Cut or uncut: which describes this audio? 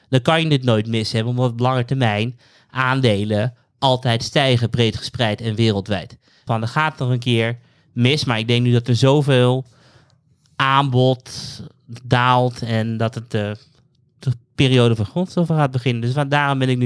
cut